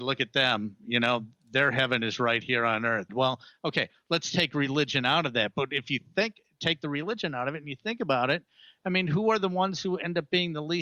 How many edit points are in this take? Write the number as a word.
one